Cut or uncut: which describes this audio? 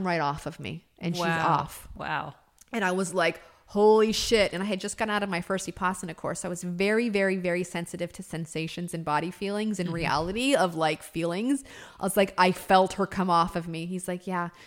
uncut